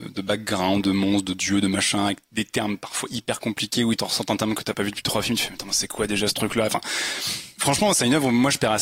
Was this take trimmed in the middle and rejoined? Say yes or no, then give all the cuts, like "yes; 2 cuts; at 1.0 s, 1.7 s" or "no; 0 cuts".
no; 0 cuts